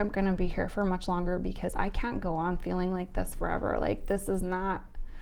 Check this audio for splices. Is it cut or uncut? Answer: uncut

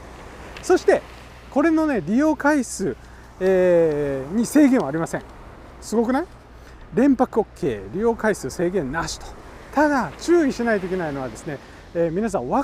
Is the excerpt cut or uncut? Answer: uncut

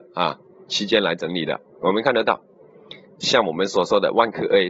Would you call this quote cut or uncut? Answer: uncut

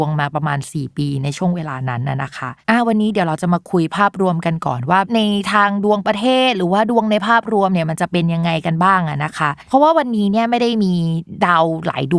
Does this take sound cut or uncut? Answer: uncut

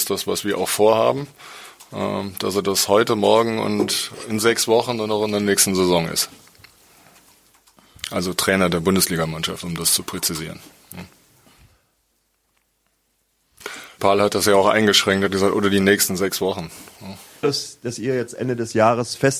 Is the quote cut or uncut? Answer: cut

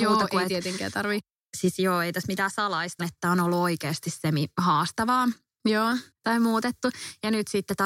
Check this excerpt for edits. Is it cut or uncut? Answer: cut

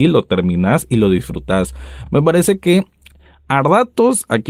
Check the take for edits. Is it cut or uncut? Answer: uncut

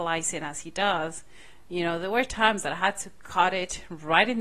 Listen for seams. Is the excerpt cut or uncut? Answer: uncut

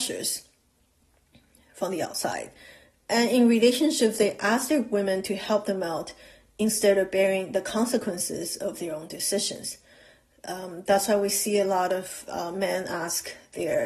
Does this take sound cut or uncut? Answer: uncut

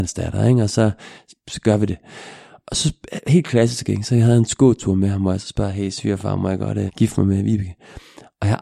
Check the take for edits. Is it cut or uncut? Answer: cut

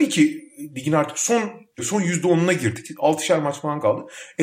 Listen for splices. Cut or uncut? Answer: uncut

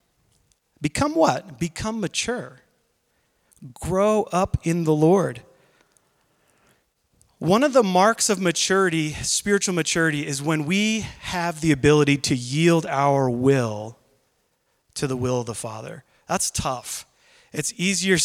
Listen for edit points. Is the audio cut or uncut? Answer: uncut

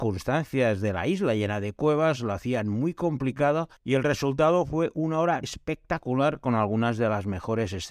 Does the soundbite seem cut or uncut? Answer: cut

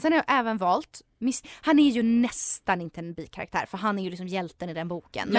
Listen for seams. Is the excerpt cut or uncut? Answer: cut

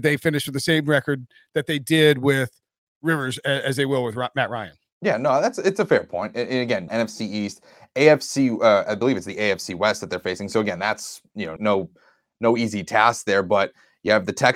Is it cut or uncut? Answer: cut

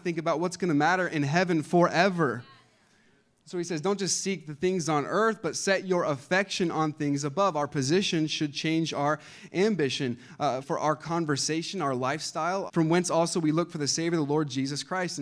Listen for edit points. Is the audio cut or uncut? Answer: cut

